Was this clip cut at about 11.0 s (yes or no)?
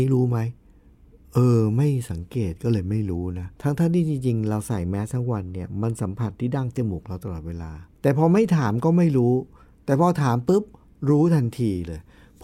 no